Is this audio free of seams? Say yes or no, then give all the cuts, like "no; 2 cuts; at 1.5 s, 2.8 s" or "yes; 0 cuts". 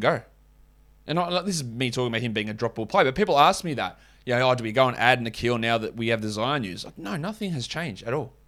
yes; 0 cuts